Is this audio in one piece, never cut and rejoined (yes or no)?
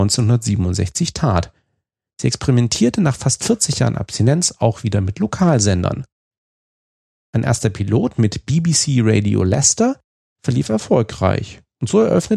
yes